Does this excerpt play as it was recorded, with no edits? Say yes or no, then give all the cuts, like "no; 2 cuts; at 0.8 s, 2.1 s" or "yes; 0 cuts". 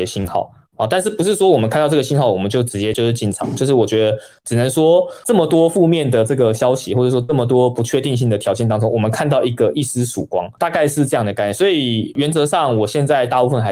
yes; 0 cuts